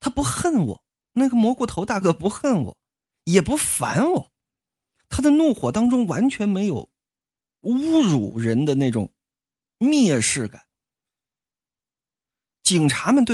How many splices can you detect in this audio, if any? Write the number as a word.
one